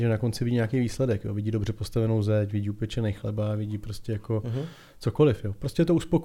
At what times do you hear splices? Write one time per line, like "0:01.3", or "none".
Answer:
none